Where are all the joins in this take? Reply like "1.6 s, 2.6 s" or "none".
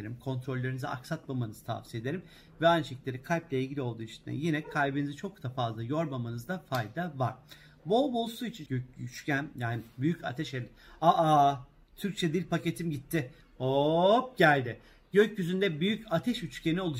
8.7 s